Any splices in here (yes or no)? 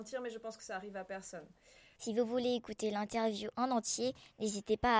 yes